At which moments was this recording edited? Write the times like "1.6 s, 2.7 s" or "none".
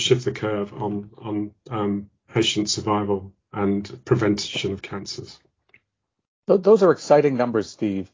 none